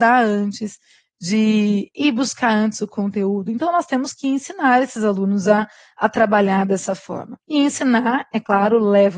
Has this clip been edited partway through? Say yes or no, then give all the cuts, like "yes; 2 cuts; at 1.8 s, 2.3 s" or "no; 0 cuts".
yes; 1 cut; at 7.4 s